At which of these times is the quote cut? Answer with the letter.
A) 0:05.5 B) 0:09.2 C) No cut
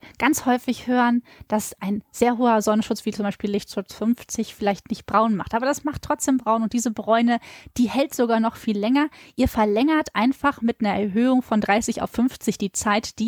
C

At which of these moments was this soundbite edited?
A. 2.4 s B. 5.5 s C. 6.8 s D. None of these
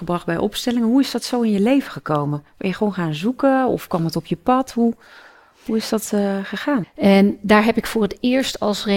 C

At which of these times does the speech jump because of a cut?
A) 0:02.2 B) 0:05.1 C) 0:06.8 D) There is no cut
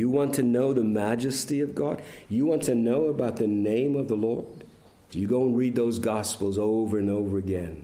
B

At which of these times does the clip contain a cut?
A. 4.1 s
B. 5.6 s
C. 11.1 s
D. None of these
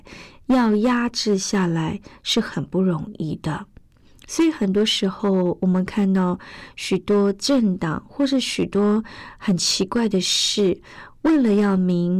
D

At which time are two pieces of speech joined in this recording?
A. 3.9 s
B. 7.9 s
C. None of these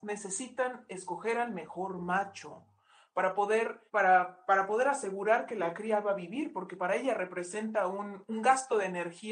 A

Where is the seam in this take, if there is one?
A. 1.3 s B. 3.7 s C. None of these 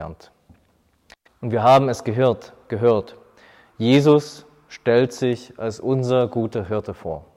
A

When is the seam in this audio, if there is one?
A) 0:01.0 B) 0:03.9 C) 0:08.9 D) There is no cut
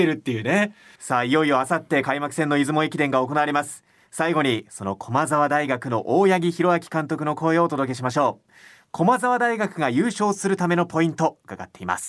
A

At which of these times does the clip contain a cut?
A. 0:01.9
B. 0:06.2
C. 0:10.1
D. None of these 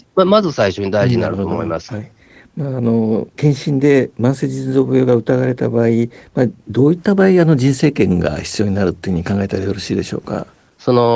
A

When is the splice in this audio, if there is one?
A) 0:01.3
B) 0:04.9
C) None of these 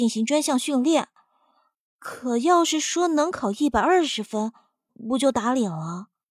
B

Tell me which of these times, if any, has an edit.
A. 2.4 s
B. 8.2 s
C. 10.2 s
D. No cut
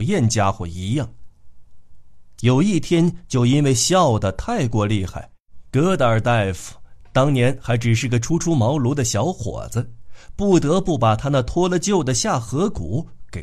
A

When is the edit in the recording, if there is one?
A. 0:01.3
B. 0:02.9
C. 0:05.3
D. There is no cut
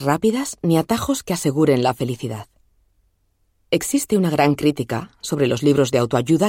D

